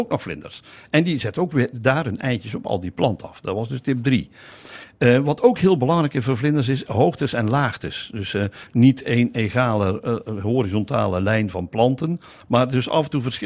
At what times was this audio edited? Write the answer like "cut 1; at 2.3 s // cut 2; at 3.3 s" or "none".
none